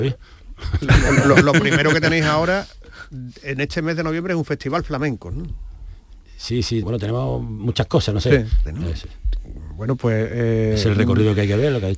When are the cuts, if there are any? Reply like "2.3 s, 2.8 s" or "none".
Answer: 6.8 s, 8.7 s